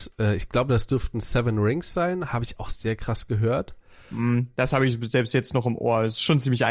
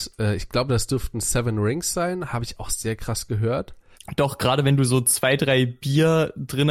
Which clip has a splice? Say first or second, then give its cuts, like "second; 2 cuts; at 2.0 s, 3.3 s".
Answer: second; 1 cut; at 3.9 s